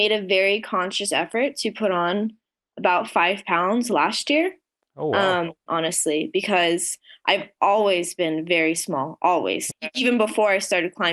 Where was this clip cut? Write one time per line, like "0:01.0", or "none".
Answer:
0:05.7
0:09.7